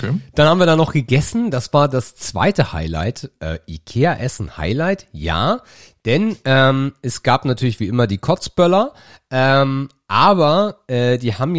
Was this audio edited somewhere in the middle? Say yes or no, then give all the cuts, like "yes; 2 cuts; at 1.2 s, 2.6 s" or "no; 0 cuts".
no; 0 cuts